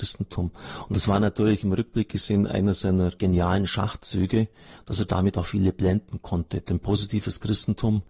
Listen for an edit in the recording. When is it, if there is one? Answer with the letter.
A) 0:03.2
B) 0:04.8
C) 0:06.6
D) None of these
A